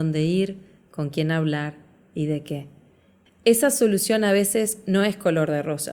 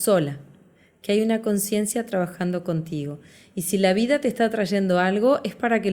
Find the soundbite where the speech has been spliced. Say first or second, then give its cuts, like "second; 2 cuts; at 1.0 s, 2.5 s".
first; 1 cut; at 3.3 s